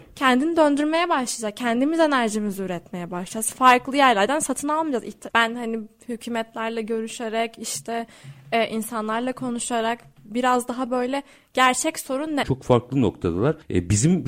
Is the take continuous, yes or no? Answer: no